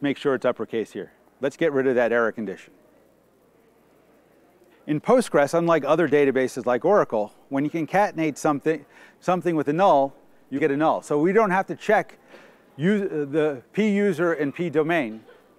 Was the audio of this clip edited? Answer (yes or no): yes